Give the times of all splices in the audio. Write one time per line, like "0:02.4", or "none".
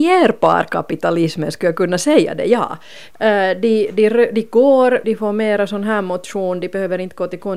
0:03.1
0:05.0